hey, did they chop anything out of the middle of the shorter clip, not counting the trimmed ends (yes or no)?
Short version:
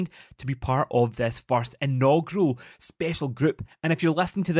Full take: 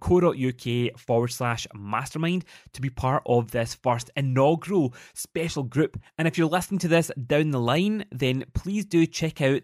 no